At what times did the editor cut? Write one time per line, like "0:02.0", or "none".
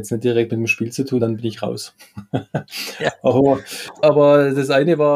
0:01.2
0:04.0